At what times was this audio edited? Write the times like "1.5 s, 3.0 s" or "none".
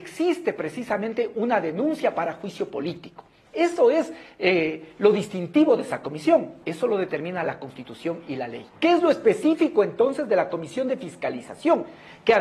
6.6 s, 8.7 s